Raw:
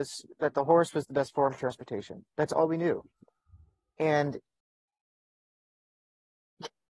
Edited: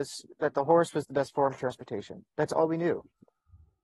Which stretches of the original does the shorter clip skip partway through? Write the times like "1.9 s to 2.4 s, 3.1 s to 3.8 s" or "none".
none

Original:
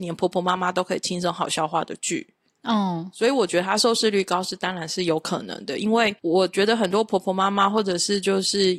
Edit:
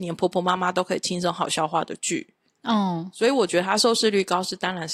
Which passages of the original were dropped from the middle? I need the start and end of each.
none

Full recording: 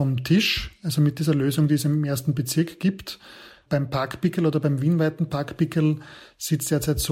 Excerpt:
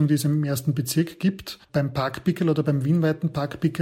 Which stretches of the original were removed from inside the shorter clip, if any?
3.2 s to 3.6 s

